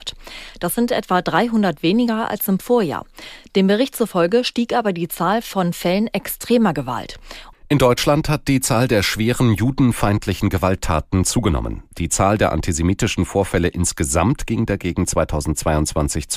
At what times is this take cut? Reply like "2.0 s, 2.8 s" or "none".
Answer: 7.5 s